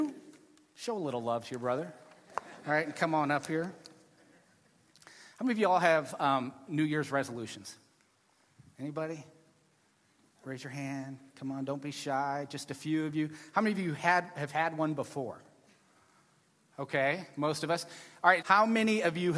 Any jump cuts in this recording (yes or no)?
yes